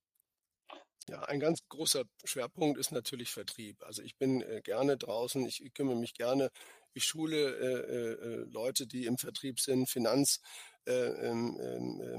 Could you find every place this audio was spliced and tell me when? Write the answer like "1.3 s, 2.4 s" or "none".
1.0 s

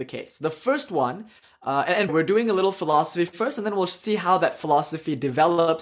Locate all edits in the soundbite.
2.1 s

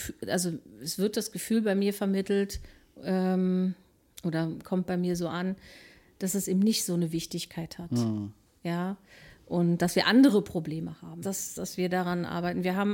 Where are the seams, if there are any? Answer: 11.2 s

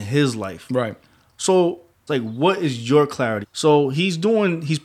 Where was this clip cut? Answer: 2.1 s, 3.4 s

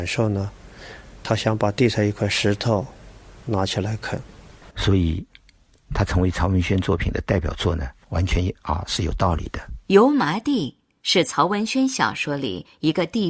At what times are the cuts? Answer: 4.7 s

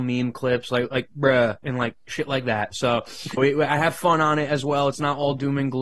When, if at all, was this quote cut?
3.4 s

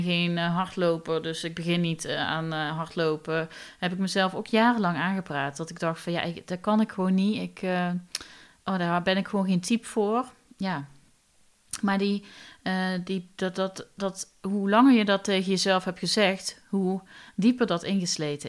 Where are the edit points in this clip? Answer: none

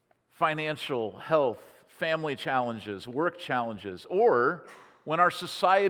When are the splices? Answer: none

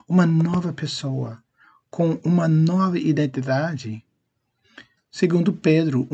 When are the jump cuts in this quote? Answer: 5.0 s

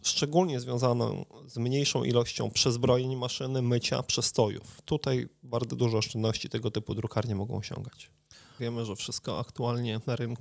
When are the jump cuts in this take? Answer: 8.6 s

